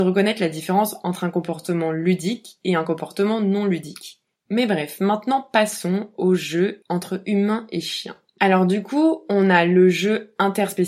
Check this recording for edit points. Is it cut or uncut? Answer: uncut